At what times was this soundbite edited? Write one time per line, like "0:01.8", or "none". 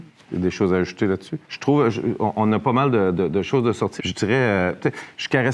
0:01.4
0:04.0